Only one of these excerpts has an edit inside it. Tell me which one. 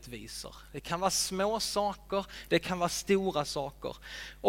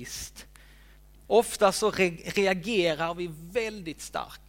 second; 1 cut; at 1.3 s

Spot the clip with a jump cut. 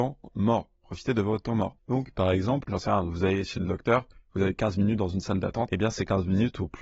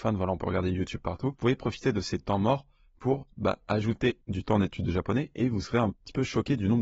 first; 1 cut; at 1.8 s

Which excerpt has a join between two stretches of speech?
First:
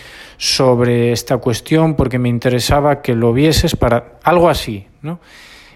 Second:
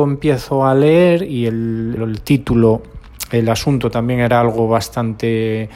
second; 1 cut; at 2.0 s

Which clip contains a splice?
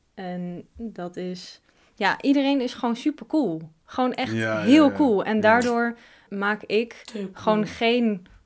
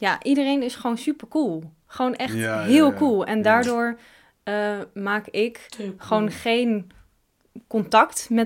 first; 1 cut; at 6.3 s

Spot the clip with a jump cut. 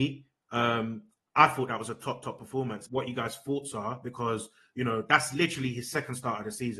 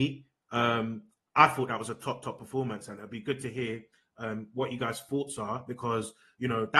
first; 1 cut; at 2.9 s

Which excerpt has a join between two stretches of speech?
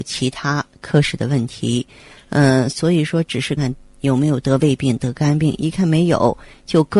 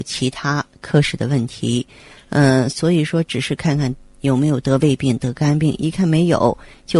first; 1 cut; at 3.6 s

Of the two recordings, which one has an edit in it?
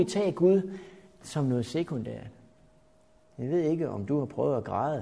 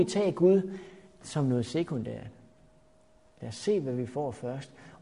first; 1 cut; at 3.2 s

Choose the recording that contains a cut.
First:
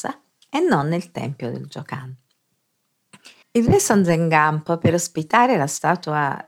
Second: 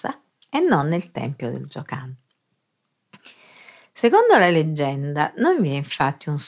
first; 1 cut; at 3.4 s

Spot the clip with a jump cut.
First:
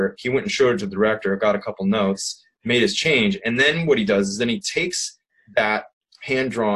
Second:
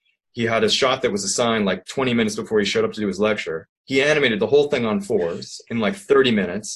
second; 1 cut; at 3.8 s

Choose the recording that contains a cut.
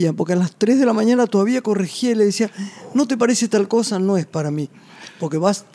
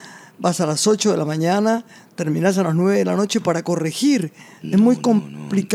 second; 1 cut; at 4.6 s

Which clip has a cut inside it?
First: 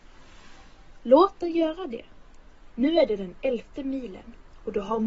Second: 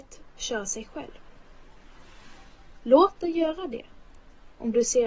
first; 1 cut; at 2.7 s

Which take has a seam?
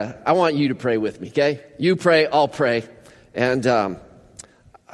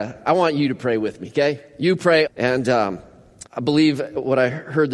second; 2 cuts; at 2.3 s, 3.5 s

